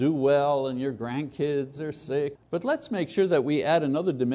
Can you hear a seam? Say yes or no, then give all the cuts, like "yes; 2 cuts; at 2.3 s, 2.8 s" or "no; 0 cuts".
yes; 1 cut; at 2.3 s